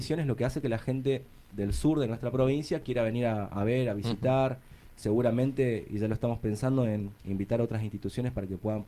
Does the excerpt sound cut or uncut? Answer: cut